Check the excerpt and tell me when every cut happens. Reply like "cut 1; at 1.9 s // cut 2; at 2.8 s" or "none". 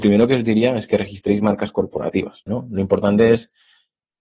cut 1; at 2.5 s

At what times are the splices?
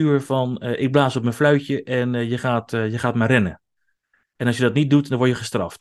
none

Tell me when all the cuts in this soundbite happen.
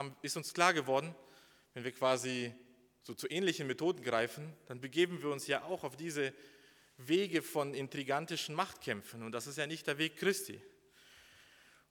none

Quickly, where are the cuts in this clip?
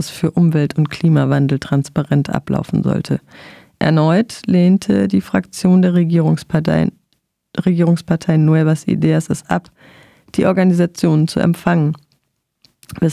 none

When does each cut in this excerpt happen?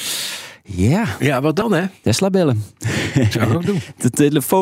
cut 1; at 2.0 s

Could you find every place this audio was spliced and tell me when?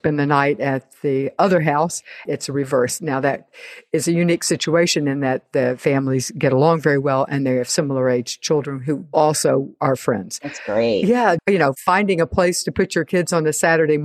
cut 1; at 2.3 s // cut 2; at 11.4 s

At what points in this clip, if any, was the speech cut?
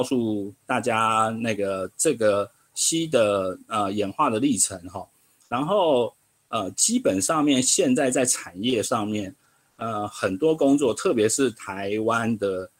none

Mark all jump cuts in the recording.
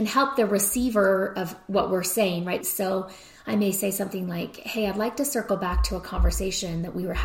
cut 1; at 2.6 s

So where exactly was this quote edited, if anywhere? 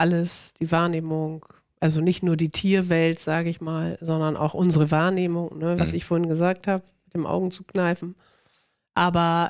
cut 1; at 5.8 s

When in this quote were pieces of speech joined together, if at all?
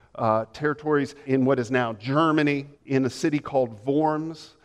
cut 1; at 1.3 s // cut 2; at 2.7 s

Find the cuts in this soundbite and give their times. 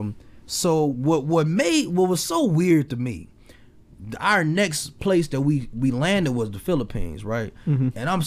none

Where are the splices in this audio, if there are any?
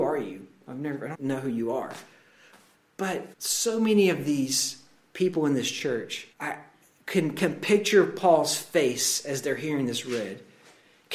cut 1; at 1.1 s // cut 2; at 3.3 s // cut 3; at 6.3 s

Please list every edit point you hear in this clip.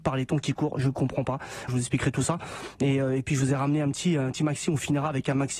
cut 1; at 1.7 s

